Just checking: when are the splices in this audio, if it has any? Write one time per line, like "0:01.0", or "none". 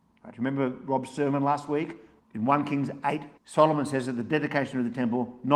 0:02.2
0:03.4